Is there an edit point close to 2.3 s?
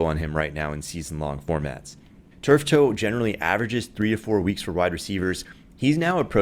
yes; 1 cut; at 2.3 s

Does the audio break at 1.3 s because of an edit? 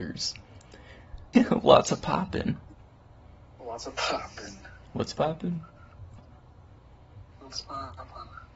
yes; 1 cut; at 1.3 s

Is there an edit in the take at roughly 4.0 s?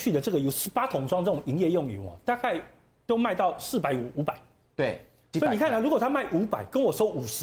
no; 1 cut; at 5.3 s

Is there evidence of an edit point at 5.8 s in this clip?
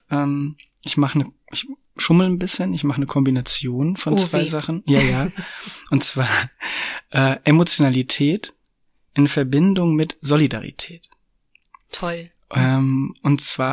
no; 0 cuts

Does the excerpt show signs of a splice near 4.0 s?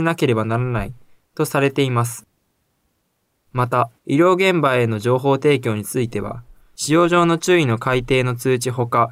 yes; 1 cut; at 4.0 s

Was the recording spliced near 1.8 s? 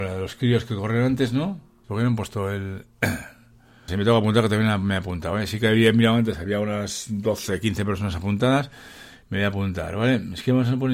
yes; 2 cuts; at 1.8 s, 3.9 s

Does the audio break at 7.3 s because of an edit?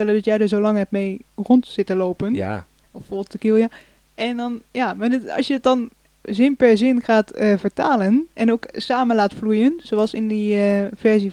no; 1 cut; at 2.8 s

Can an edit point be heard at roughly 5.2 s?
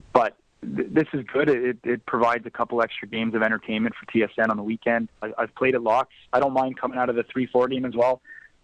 yes; 1 cut; at 5.2 s

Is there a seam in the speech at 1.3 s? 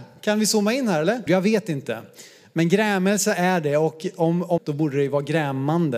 yes; 2 cuts; at 1.3 s, 4.6 s

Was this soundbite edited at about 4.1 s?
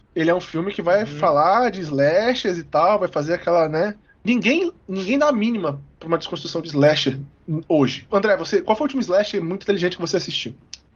yes; 2 cuts; at 4.1 s, 8.1 s

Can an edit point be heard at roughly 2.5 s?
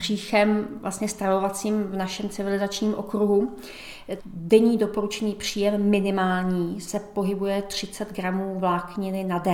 no; 1 cut; at 4.2 s

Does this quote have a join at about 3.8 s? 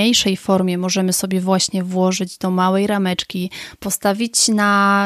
yes; 1 cut; at 3.8 s

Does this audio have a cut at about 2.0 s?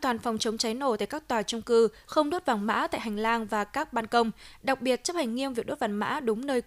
yes; 1 cut; at 2.0 s

